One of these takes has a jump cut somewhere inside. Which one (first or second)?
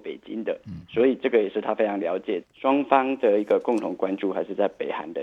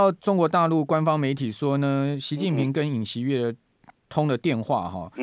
first